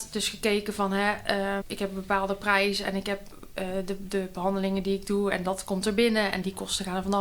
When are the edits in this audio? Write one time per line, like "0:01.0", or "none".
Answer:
0:01.6